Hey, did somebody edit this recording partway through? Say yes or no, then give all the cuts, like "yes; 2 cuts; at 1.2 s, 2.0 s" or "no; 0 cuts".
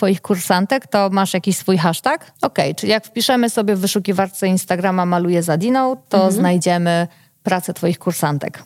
yes; 1 cut; at 2.4 s